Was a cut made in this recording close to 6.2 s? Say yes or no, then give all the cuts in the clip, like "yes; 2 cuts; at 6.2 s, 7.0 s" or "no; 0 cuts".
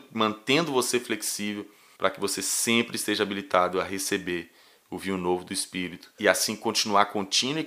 yes; 2 cuts; at 2.0 s, 6.2 s